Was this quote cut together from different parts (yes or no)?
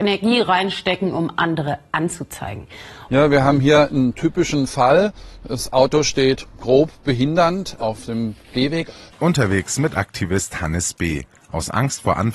yes